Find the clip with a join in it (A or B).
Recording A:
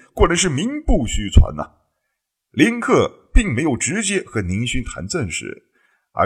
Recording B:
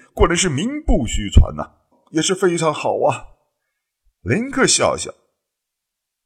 B